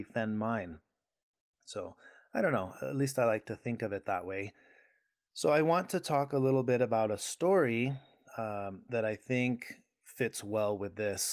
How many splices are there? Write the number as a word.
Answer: zero